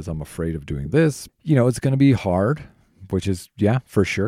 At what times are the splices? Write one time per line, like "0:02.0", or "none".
0:01.3